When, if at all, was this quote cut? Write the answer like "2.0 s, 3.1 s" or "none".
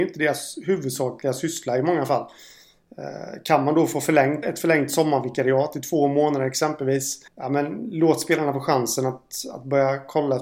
4.4 s, 7.3 s

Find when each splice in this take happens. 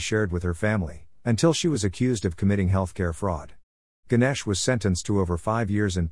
3.9 s

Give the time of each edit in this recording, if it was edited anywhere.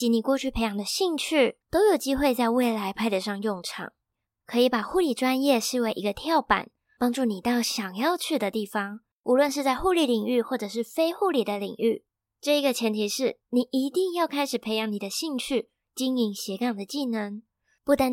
1.6 s

